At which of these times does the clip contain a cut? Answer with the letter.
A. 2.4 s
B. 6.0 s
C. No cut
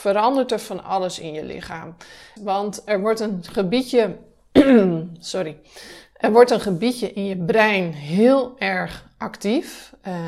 A